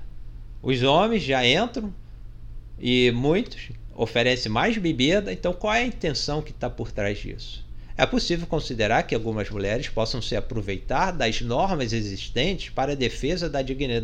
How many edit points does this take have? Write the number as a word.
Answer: zero